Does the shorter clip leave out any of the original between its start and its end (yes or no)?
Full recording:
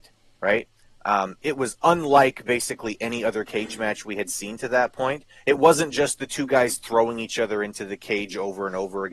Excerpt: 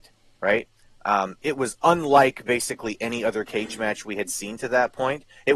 no